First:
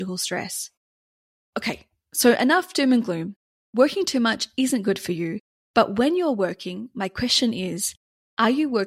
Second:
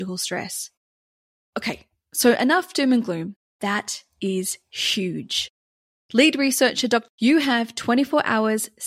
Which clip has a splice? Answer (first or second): second